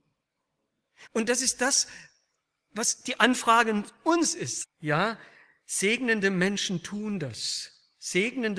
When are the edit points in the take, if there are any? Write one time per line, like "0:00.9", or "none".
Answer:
0:01.0
0:04.6